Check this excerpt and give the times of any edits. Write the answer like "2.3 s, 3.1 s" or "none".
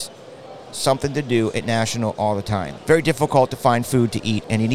2.8 s